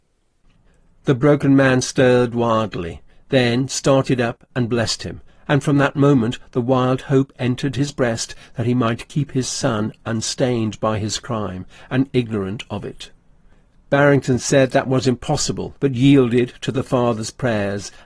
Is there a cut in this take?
yes; 2 cuts; at 12.1 s, 15.8 s

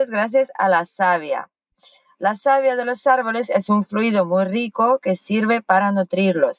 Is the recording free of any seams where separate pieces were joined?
yes; 0 cuts

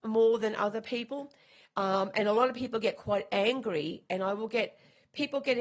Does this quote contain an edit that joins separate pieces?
yes; 1 cut; at 1.6 s

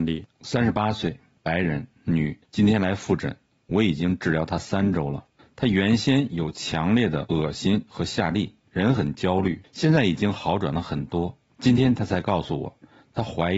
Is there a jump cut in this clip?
yes; 1 cut; at 9.6 s

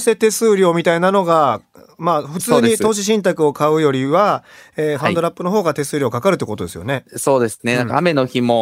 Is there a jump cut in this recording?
no; 0 cuts

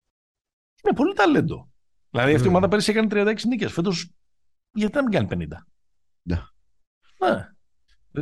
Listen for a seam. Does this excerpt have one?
yes; 1 cut; at 6.3 s

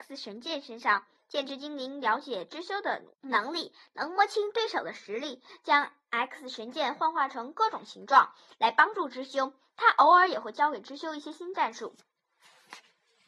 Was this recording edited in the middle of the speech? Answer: yes; 1 cut; at 3.1 s

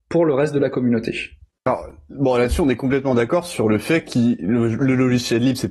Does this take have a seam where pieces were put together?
no; 0 cuts

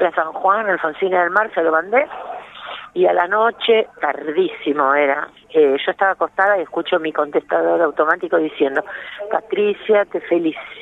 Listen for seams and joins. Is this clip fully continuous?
yes; 0 cuts

